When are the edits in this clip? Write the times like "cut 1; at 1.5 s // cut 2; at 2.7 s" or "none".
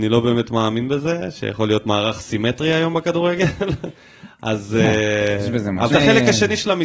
cut 1; at 5.9 s